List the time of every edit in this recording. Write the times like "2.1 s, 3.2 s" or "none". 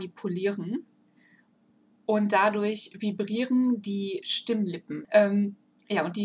5.0 s